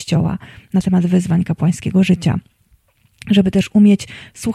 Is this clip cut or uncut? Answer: uncut